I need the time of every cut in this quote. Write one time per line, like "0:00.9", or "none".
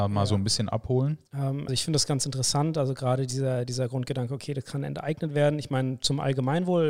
0:01.7